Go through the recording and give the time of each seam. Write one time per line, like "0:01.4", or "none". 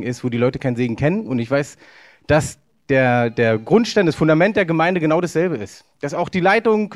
none

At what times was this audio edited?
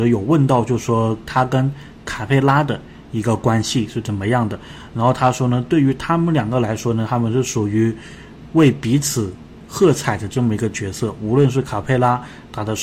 0:04.9

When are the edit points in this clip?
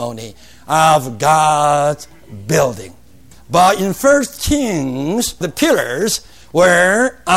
0:03.4

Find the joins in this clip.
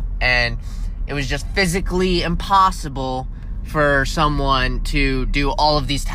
none

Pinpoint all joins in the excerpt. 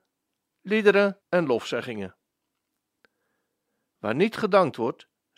0:01.2

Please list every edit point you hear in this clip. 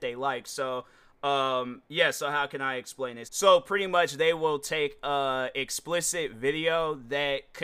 0:03.2

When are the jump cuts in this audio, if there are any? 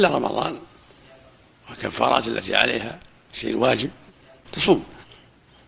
none

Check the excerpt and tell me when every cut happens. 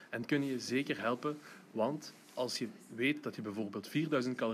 0:02.2

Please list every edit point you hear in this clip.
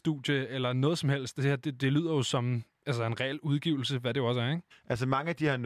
0:04.7

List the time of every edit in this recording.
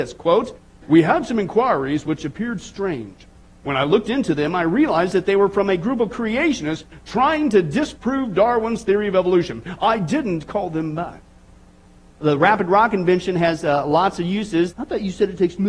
0:12.1
0:14.7

